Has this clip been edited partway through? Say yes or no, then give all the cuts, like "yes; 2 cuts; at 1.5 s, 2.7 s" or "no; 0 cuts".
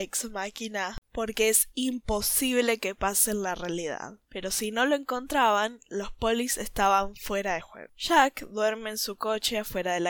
no; 0 cuts